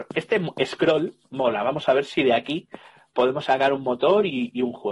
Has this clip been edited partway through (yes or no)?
no